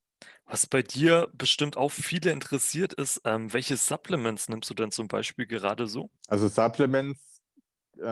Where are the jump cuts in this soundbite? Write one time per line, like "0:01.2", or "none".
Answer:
0:06.2